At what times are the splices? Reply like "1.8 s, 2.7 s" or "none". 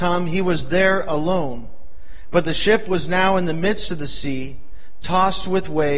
none